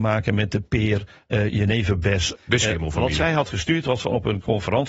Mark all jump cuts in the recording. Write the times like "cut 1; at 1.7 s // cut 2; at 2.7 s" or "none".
cut 1; at 2.3 s

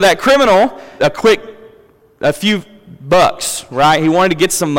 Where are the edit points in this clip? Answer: cut 1; at 1.0 s

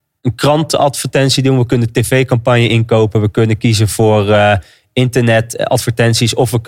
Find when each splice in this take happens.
none

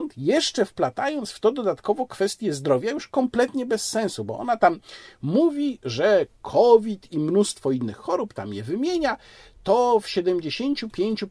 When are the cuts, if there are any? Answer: none

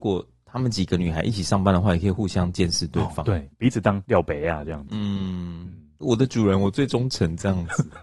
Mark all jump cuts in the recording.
cut 1; at 3.5 s

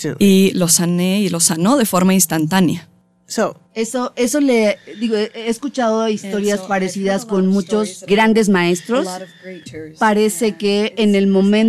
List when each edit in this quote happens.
cut 1; at 8.1 s // cut 2; at 9.7 s

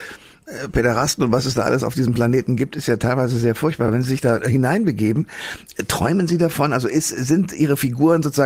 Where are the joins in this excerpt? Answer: none

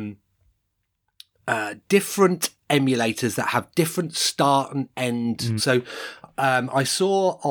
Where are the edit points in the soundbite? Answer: cut 1; at 5.6 s

